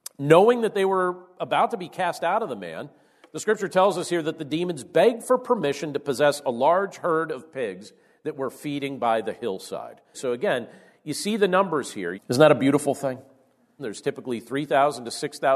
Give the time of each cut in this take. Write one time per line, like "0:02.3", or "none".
0:10.1
0:12.1
0:13.8